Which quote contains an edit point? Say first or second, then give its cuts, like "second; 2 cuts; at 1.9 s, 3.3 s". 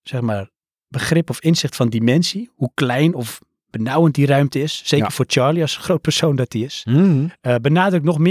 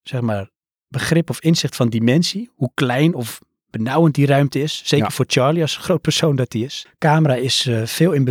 second; 1 cut; at 6.9 s